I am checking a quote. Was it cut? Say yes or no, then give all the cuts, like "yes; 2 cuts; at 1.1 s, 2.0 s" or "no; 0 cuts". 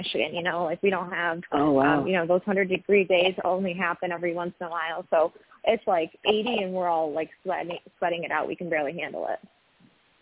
no; 0 cuts